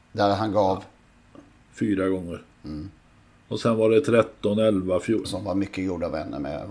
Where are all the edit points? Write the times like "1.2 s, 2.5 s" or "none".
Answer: 5.2 s